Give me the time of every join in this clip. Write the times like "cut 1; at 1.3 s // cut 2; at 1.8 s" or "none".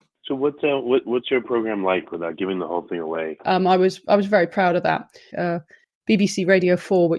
cut 1; at 3.4 s // cut 2; at 5.3 s

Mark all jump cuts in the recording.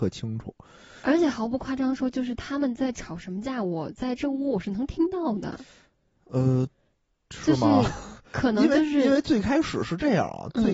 none

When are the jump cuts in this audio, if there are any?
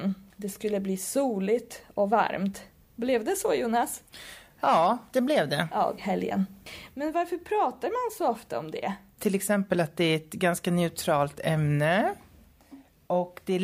cut 1; at 6.0 s // cut 2; at 9.2 s

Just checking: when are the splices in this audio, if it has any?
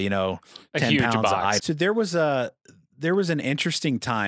cut 1; at 1.6 s

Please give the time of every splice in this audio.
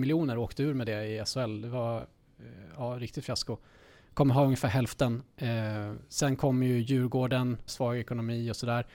cut 1; at 7.7 s

